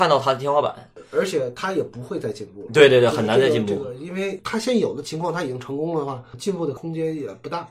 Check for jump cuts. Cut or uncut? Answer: uncut